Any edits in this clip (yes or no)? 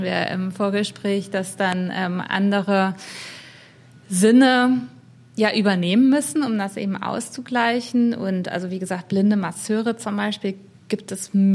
no